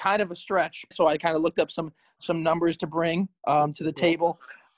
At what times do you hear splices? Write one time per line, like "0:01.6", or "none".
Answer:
0:00.9